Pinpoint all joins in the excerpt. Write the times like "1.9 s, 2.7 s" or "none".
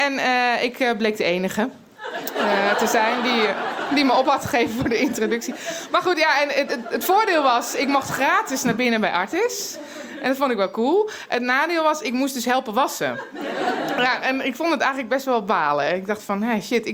none

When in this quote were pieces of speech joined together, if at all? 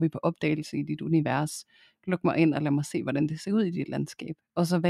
none

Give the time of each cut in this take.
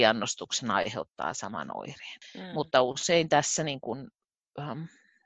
2.2 s

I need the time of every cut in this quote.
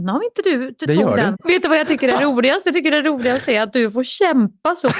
1.3 s

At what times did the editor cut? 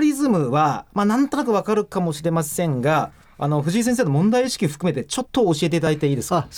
5.3 s

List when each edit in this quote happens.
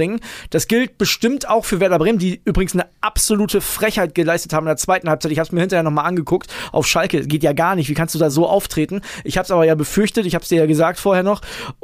none

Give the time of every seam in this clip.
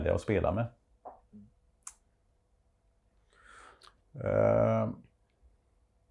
4.0 s

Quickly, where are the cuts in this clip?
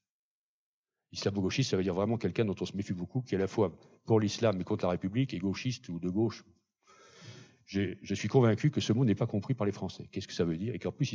none

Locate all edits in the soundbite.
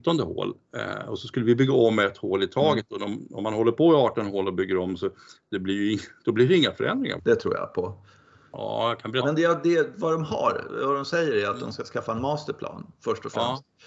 7.2 s, 9.2 s

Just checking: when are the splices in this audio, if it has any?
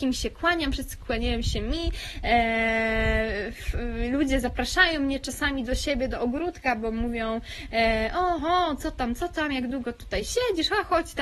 8.4 s

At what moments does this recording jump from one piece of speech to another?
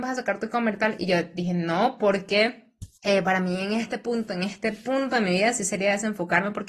2.9 s

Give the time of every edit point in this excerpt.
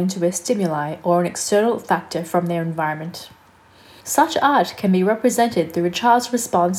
4.0 s

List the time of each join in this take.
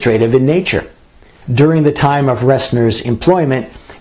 1.4 s

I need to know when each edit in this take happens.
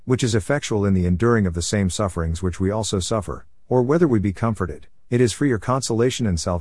none

